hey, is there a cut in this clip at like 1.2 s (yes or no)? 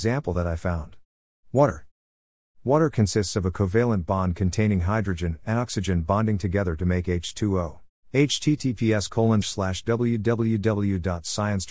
no